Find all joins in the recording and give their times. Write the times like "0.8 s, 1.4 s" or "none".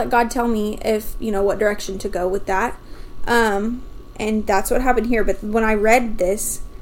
none